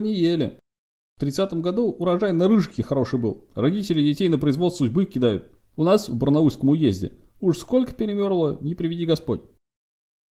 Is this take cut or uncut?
cut